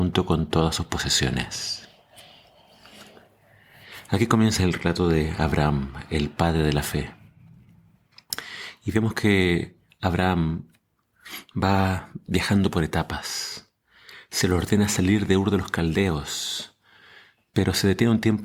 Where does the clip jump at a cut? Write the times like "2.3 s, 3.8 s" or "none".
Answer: 4.6 s